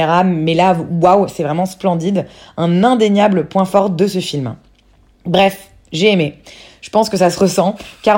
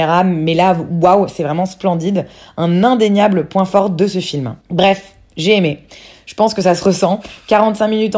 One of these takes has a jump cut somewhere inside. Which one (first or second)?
second